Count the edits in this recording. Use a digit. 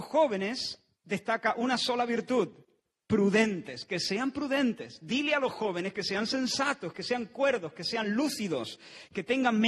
0